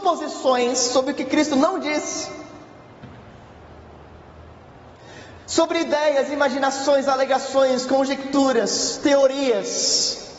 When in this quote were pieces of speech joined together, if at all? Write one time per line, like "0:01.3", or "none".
none

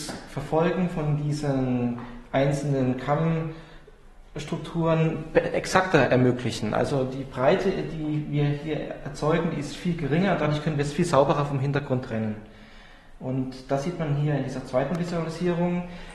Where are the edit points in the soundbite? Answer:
none

